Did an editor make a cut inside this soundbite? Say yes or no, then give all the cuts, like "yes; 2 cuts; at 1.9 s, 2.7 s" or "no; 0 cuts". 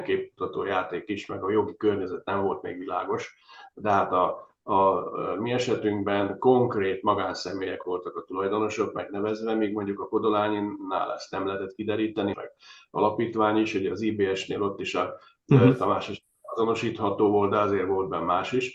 yes; 1 cut; at 12.3 s